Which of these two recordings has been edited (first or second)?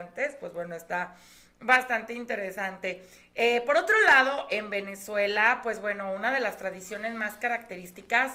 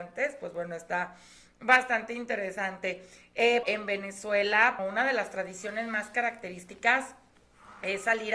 second